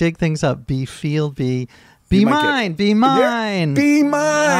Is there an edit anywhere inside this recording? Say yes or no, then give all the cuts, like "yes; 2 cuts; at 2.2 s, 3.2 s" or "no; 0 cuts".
no; 0 cuts